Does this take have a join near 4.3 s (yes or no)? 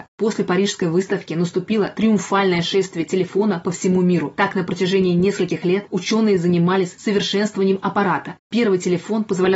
no